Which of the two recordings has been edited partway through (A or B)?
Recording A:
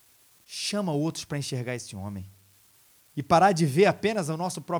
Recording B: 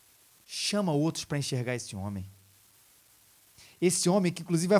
A